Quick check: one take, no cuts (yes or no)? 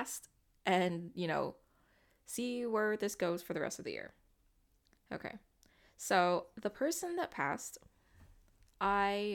yes